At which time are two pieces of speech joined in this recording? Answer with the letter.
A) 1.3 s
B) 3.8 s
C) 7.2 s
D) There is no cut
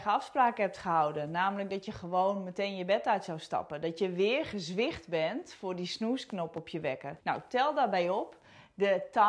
C